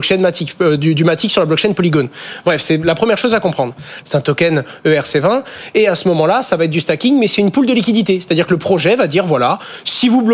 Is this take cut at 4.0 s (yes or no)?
yes